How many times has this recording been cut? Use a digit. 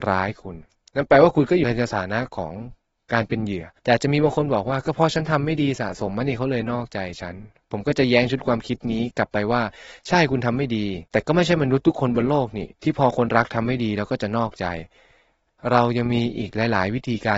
2